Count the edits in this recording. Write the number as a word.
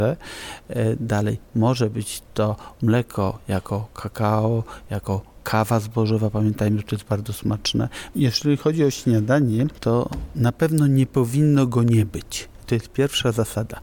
one